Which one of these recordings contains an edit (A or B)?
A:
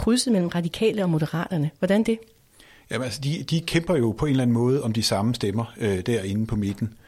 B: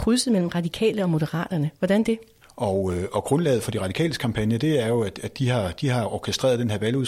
B